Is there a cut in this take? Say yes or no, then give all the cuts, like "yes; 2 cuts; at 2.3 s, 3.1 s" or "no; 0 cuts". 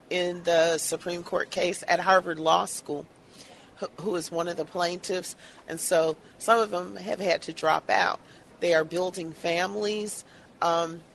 yes; 2 cuts; at 5.6 s, 8.5 s